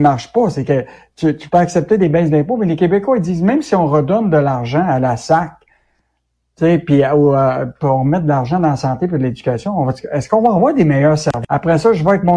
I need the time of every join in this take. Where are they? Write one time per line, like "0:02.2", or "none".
0:11.4